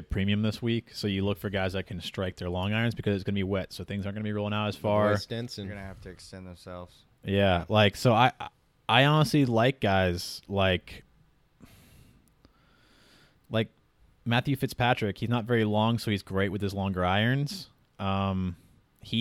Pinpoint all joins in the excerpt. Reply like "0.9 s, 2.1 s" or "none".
none